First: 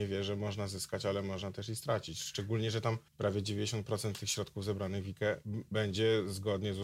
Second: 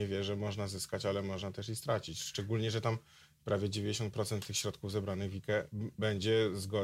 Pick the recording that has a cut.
first; 1 cut; at 3.1 s

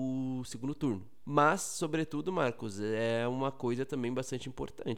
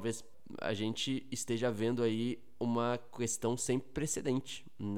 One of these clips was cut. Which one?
first; 1 cut; at 1.2 s

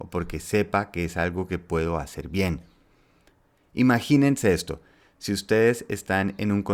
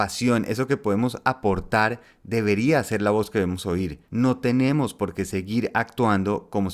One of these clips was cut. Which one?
second; 1 cut; at 4.1 s

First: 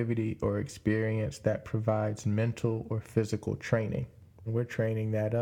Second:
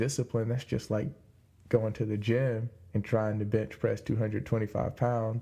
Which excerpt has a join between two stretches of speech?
first; 1 cut; at 4.5 s

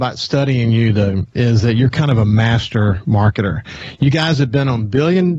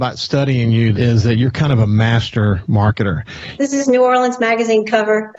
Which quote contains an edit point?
second; 2 cuts; at 0.9 s, 3.6 s

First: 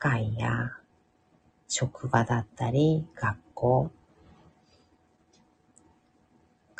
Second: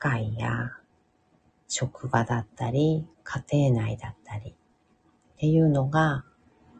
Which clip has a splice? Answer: second; 1 cut; at 3.1 s

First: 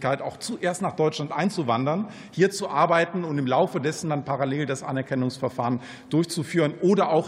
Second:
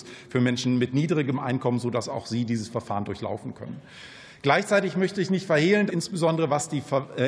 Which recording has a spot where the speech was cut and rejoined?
second; 1 cut; at 5.9 s

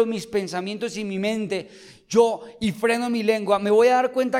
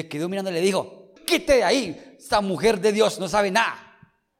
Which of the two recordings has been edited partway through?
second; 1 cut; at 1.2 s

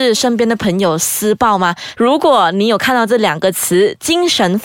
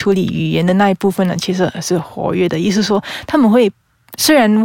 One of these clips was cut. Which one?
first; 1 cut; at 1.9 s

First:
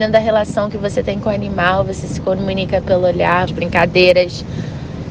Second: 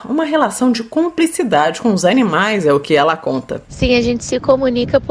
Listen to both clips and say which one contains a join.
first; 1 cut; at 3.5 s

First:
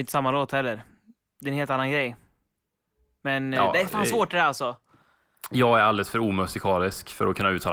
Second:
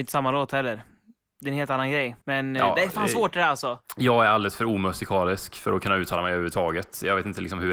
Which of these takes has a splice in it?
second; 2 cuts; at 2.2 s, 3.8 s

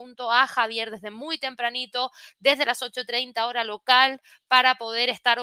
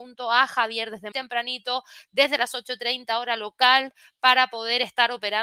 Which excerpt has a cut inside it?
second; 1 cut; at 1.1 s

